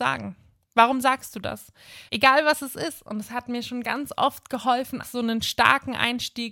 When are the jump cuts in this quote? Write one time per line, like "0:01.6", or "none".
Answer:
0:02.1
0:05.0